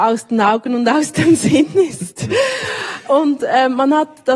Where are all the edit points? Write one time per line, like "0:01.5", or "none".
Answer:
none